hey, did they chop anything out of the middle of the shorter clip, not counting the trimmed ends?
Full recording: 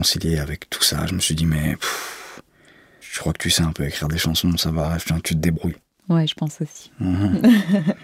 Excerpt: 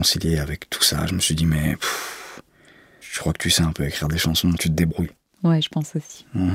yes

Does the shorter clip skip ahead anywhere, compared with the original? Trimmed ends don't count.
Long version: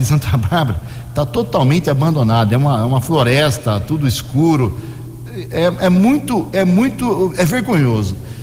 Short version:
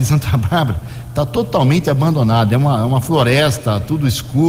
no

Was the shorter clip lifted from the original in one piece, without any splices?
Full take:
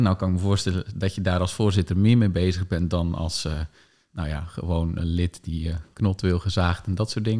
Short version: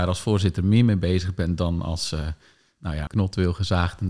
no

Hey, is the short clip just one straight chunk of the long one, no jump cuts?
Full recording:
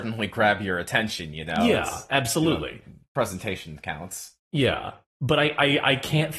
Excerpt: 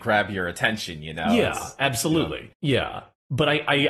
no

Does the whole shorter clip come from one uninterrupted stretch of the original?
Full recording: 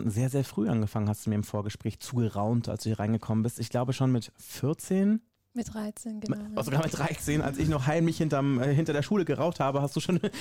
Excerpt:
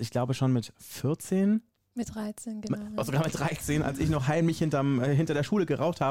yes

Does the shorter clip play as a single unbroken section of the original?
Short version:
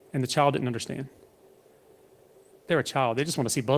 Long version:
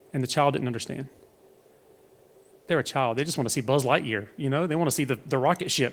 yes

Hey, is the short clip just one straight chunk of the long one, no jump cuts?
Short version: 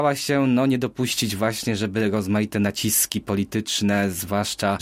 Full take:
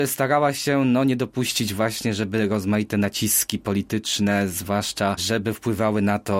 yes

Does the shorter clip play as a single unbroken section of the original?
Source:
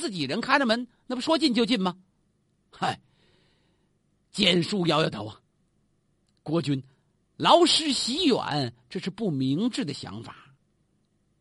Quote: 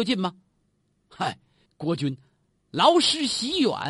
no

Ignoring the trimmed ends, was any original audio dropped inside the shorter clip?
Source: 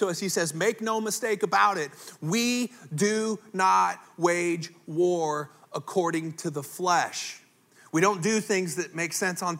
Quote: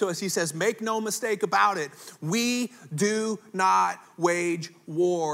no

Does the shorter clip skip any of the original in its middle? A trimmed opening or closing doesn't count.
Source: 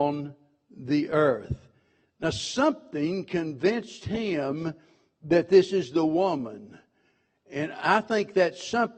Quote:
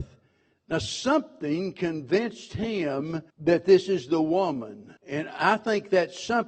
yes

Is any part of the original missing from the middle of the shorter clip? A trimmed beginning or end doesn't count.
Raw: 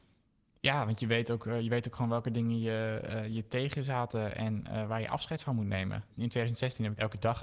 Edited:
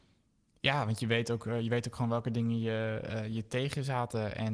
no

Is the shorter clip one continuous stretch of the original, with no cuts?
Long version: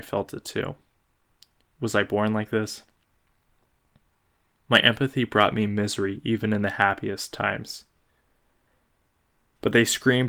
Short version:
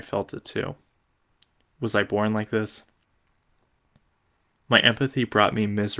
yes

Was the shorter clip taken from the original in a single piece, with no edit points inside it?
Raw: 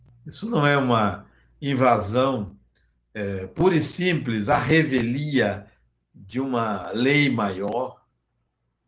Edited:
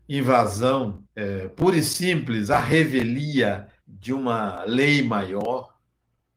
no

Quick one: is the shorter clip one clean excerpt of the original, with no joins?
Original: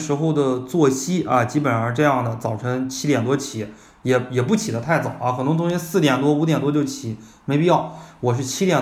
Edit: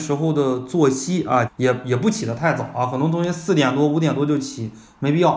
no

